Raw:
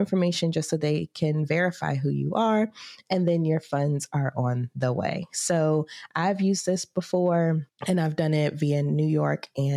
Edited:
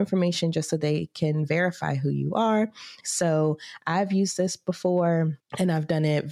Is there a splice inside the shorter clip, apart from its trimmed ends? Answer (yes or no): yes